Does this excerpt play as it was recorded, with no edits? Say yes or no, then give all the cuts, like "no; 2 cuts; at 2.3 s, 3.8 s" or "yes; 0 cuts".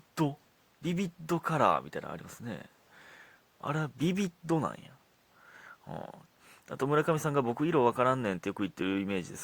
yes; 0 cuts